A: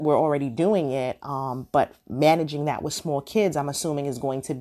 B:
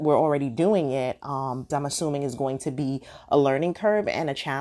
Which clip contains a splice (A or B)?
B